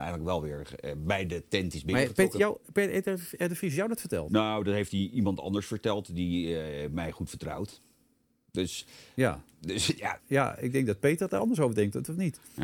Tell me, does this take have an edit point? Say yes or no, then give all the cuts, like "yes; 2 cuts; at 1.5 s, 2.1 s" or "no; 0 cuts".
yes; 1 cut; at 10.2 s